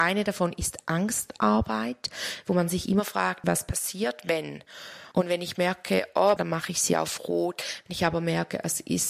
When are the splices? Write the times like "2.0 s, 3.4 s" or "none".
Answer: 3.4 s, 5.1 s, 6.4 s